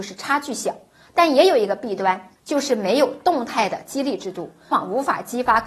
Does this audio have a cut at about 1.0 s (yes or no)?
no